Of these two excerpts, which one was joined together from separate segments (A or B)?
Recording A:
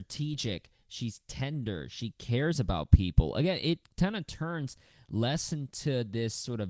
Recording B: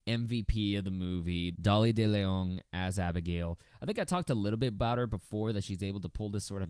B